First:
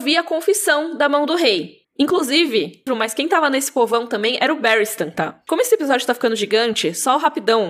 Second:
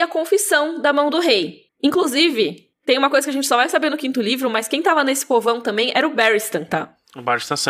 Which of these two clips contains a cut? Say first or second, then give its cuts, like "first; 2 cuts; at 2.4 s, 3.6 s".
first; 2 cuts; at 2.9 s, 5.5 s